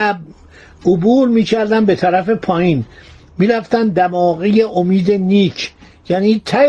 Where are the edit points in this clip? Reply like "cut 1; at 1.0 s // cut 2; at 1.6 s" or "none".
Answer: none